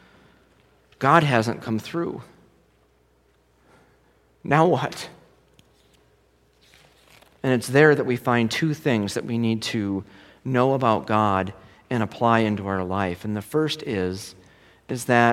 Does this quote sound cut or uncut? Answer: uncut